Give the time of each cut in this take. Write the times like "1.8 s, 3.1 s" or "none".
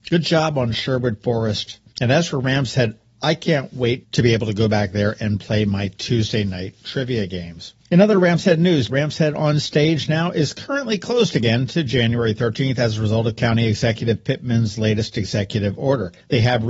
8.9 s